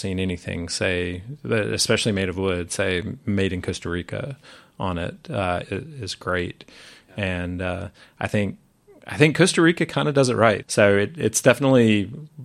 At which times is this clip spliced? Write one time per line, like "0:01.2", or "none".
0:05.6
0:10.6

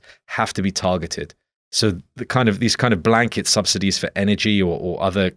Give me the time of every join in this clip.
none

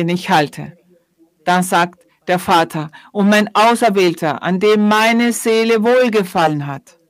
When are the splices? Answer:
none

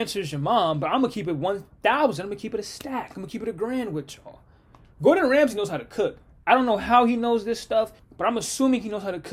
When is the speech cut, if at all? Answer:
0:08.0

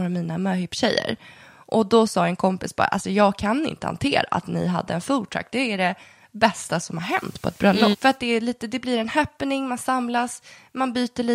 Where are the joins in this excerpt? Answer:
0:07.9

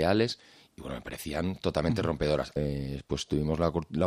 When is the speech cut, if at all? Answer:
0:02.6

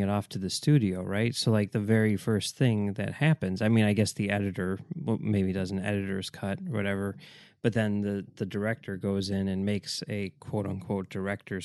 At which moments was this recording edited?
none

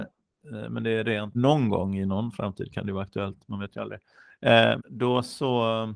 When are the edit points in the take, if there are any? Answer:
0:01.3
0:04.8

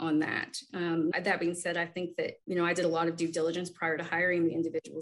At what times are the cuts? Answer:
0:01.1
0:02.4

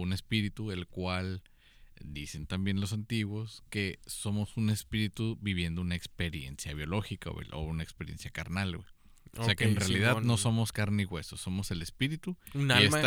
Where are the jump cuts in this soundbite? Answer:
none

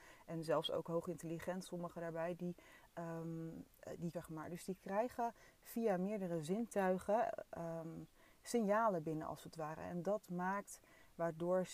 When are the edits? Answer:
0:04.1

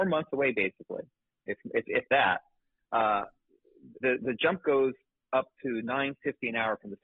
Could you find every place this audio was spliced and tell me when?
0:04.0

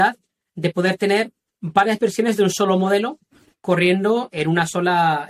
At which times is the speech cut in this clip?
0:04.3

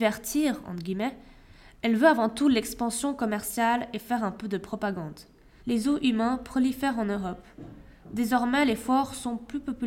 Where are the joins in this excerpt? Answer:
0:05.6

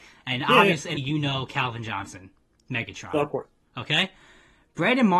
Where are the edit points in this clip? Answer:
0:01.0

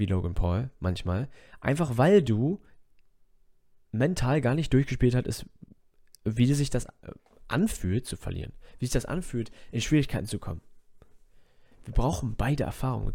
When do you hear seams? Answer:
none

